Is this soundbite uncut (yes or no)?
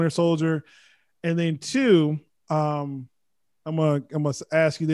yes